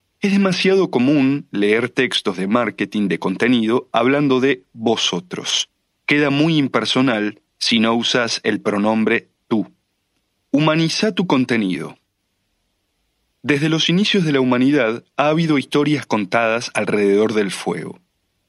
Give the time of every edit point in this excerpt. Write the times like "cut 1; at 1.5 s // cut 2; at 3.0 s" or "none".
cut 1; at 5.9 s // cut 2; at 10.4 s // cut 3; at 13.3 s